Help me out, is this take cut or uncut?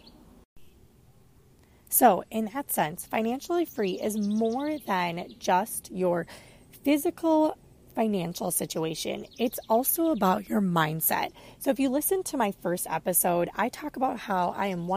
uncut